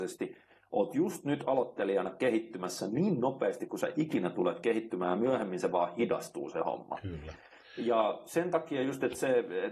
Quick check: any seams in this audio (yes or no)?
no